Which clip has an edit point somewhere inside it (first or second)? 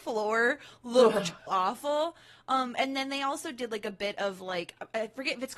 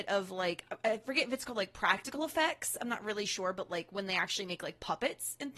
first